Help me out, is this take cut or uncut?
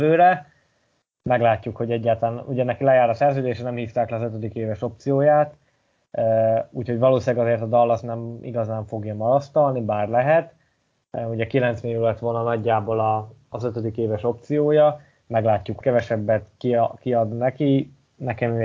cut